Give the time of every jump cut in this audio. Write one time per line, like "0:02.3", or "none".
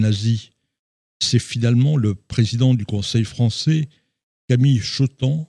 none

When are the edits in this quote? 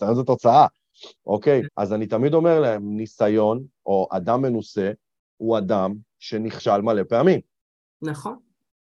0:01.6

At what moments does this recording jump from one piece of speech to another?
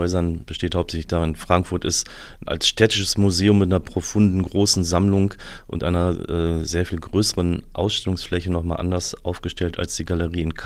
0:02.4

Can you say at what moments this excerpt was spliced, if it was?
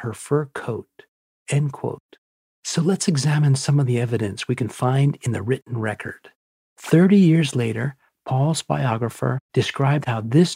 0:09.5

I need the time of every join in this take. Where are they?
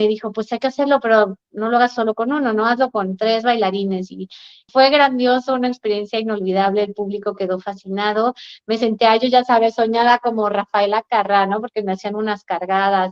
0:04.7

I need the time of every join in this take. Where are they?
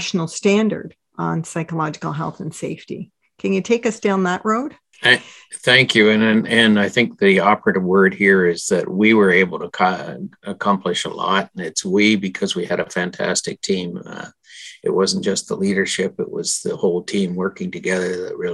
0:04.9

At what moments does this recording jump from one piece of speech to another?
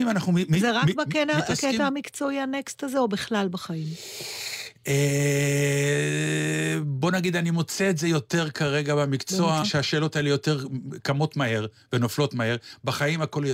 0:09.6

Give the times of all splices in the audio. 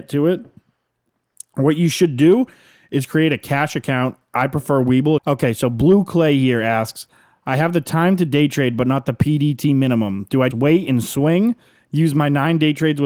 0:05.2
0:10.5

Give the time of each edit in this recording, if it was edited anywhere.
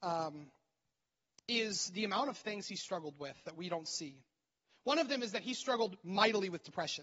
0:04.8

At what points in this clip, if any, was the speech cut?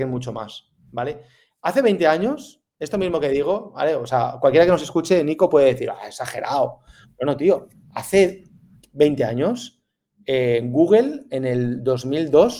none

